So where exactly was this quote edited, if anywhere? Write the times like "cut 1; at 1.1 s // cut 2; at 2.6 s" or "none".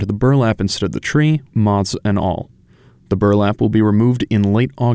cut 1; at 1.5 s